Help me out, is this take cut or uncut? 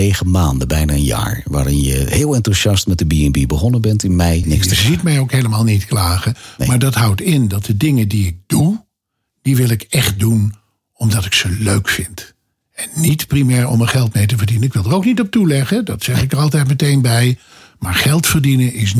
cut